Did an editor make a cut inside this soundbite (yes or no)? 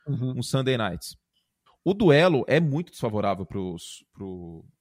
yes